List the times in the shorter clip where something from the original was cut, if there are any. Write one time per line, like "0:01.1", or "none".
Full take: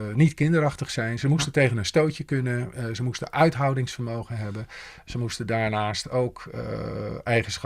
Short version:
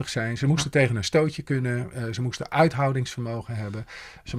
none

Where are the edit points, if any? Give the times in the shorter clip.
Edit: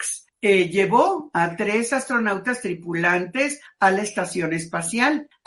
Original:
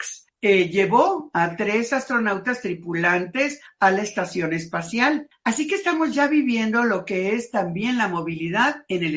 none

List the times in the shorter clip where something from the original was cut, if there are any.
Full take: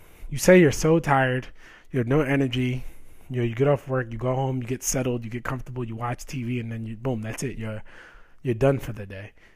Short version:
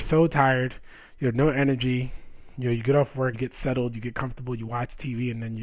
0:03.3

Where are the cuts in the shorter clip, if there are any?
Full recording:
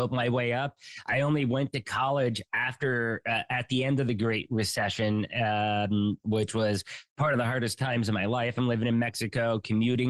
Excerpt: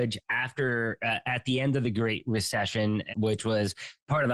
0:03.1

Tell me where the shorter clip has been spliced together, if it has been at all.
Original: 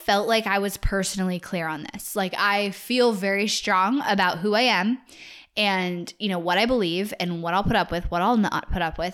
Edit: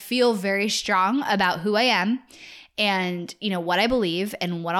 none

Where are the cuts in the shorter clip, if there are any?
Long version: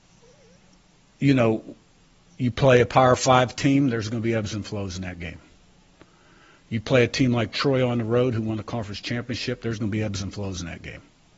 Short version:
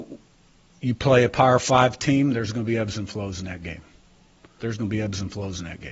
0:04.6

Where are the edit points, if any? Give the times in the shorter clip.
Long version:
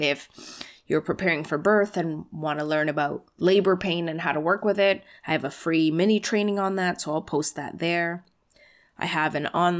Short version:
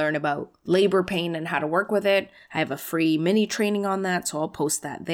none

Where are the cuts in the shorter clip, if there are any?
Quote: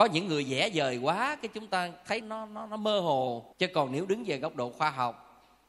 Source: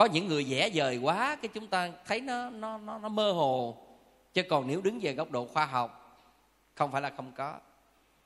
0:02.2
0:03.5

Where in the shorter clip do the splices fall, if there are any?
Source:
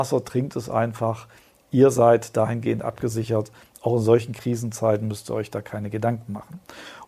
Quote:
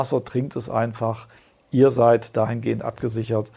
none

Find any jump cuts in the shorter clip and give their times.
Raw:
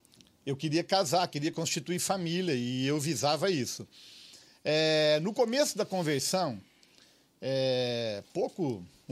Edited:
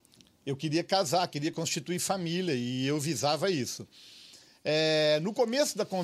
none

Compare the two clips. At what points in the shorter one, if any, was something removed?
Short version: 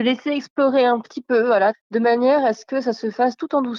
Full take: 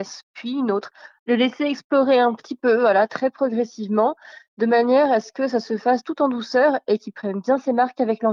0:01.7

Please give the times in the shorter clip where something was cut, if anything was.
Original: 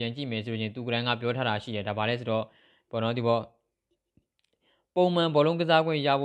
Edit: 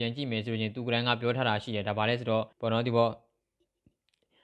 0:02.5

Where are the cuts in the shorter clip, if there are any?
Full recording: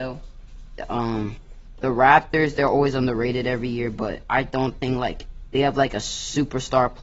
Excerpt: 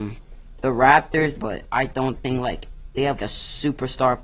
0:01.4
0:03.2

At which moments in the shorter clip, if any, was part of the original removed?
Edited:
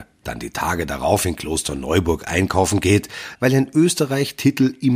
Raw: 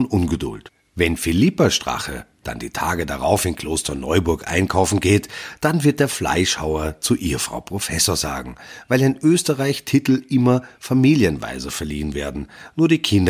0:03.4

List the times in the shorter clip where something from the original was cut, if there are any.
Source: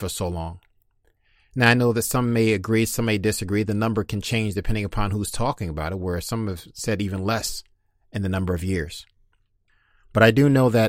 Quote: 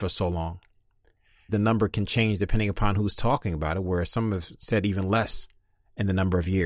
0:01.5

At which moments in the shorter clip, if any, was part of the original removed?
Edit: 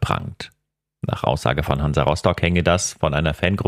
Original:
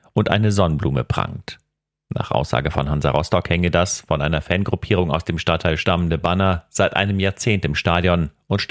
none

